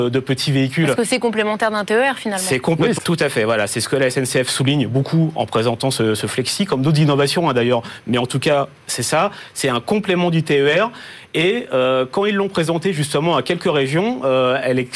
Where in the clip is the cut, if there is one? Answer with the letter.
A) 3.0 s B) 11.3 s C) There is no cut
A